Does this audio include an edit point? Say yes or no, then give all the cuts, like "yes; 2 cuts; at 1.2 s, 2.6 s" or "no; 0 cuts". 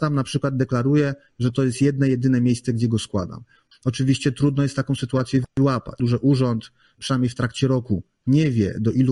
yes; 2 cuts; at 3.7 s, 6.0 s